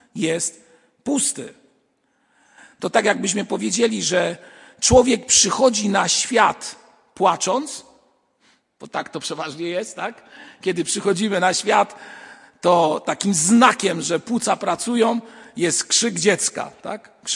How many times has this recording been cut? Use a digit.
0